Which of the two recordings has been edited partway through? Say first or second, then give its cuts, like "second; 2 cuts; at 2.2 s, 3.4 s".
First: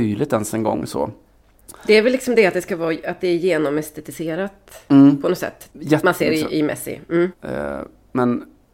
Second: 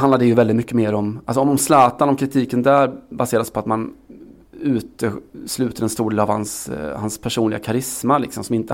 first; 2 cuts; at 5.7 s, 7.3 s